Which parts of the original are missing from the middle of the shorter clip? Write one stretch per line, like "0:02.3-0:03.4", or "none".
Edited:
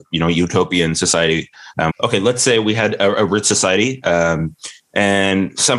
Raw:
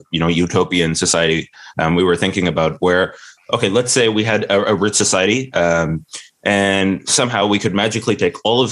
0:01.9-0:03.4